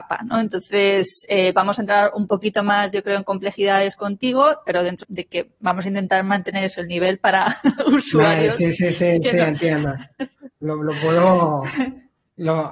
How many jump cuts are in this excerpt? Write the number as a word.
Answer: two